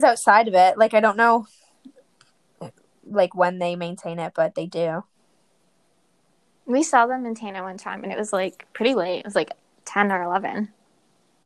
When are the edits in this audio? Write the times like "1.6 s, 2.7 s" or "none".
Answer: none